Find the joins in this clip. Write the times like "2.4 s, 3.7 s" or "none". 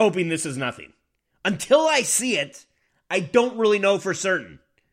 1.3 s